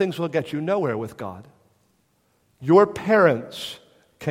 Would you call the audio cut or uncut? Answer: cut